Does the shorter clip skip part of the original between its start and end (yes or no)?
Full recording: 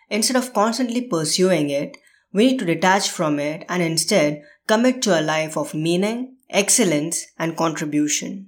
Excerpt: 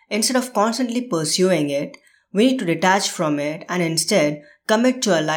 no